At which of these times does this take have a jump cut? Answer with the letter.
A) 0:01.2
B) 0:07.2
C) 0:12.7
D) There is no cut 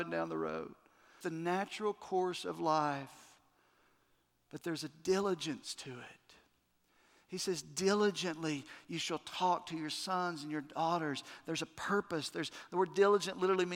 A